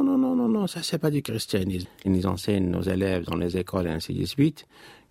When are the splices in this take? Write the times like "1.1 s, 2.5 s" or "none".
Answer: 1.8 s